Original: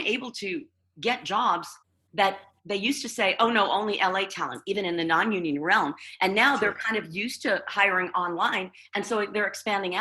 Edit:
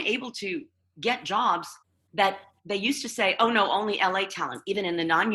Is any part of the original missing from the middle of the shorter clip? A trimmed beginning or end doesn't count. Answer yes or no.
no